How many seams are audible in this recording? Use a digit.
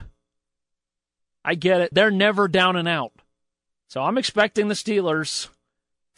2